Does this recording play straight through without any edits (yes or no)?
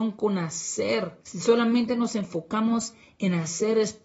no